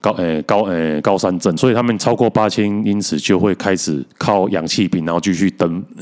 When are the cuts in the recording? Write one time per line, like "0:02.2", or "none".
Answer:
0:01.6
0:04.1

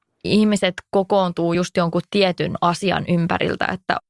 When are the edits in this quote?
none

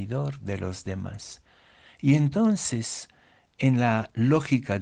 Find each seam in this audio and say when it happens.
none

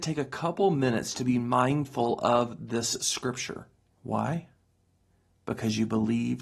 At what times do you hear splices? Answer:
0:03.9

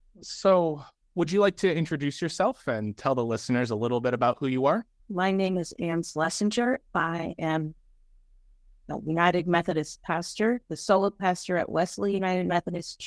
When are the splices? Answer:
0:05.0

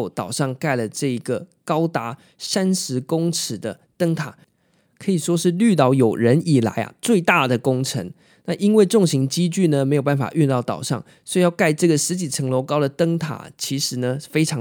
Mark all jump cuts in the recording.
none

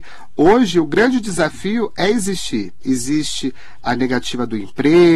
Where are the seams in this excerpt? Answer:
0:02.8
0:03.8

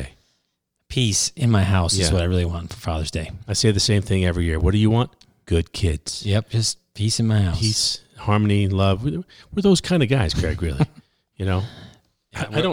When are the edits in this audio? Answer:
none

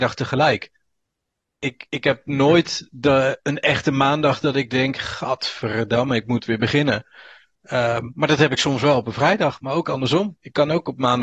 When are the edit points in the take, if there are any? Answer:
none

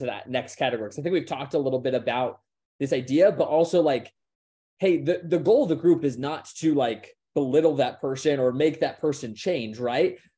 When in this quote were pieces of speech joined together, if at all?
none

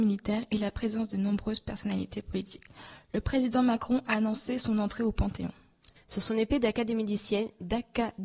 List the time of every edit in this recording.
0:06.0

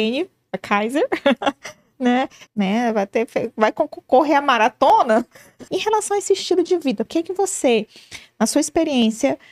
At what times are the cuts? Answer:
0:02.5
0:05.7
0:07.1

